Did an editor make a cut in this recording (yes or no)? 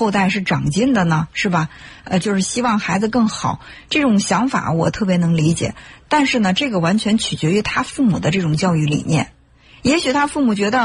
yes